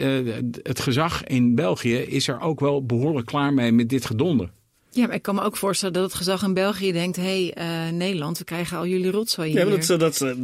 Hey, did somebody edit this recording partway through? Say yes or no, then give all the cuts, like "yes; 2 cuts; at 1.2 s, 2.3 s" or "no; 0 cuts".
no; 0 cuts